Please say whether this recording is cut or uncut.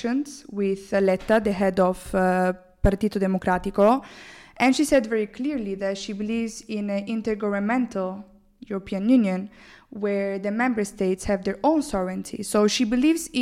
uncut